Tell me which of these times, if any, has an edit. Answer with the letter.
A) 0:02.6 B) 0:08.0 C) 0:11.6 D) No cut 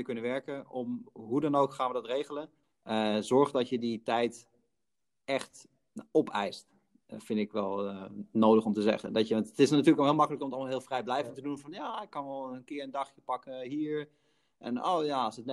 A